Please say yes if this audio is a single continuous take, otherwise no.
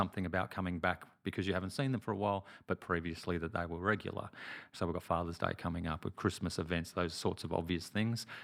no